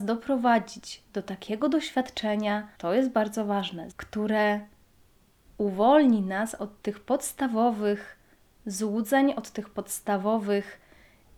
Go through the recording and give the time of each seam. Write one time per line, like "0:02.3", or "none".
0:02.7
0:03.9